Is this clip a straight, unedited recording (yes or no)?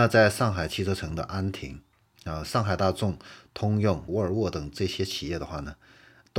no